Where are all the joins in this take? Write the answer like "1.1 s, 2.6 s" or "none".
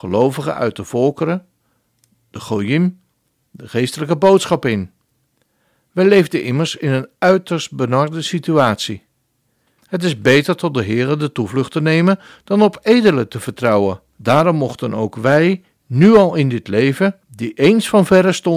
9.8 s, 14.1 s, 17.2 s